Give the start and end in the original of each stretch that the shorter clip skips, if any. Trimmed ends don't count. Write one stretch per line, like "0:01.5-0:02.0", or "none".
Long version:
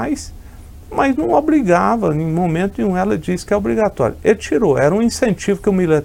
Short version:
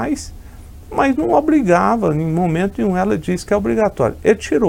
none